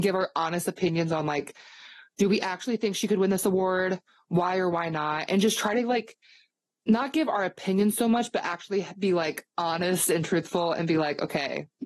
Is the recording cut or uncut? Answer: uncut